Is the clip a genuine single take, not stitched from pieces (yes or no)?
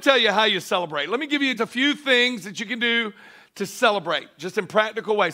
no